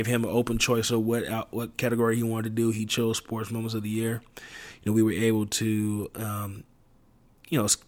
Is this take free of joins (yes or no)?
yes